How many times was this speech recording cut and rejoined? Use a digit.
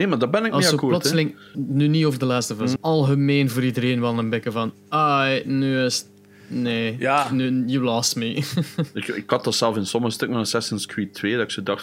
2